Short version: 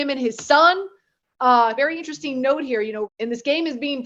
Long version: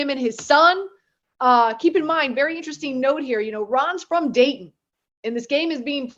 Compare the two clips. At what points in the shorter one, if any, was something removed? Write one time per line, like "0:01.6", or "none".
0:01.8
0:03.0